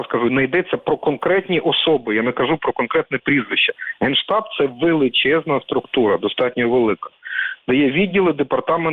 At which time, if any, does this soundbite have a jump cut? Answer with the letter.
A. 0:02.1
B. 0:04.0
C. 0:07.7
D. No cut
D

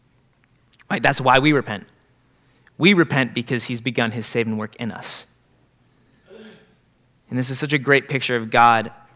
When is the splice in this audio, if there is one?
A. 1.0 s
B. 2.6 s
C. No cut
C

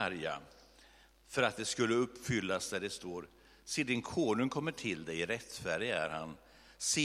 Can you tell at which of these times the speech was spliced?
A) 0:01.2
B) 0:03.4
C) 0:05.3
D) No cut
D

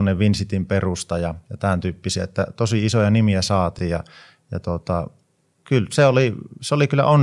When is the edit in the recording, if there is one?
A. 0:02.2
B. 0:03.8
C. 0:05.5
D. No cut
D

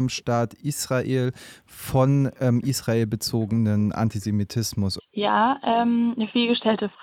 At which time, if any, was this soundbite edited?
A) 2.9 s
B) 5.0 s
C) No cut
B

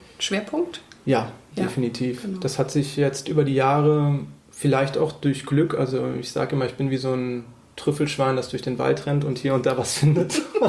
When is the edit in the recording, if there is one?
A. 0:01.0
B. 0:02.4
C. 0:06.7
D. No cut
D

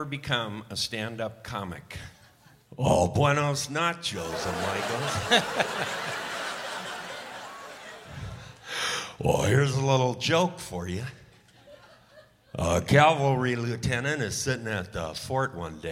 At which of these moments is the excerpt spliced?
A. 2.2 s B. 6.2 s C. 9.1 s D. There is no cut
D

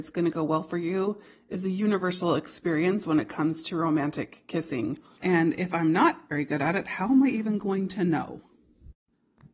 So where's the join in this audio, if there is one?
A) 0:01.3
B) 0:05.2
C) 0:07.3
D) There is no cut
B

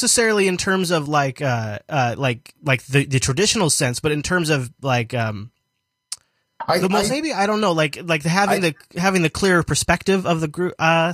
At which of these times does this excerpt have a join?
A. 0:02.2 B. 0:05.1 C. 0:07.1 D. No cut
C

